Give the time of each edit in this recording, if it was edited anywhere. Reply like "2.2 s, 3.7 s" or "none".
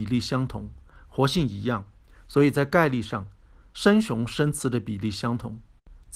none